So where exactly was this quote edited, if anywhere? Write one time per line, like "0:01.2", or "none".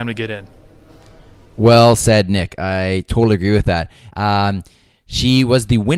0:04.1